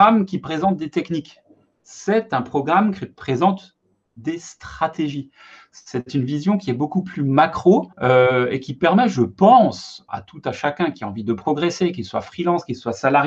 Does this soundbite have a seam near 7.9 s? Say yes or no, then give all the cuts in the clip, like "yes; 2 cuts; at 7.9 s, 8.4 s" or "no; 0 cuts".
yes; 2 cuts; at 7.9 s, 10.1 s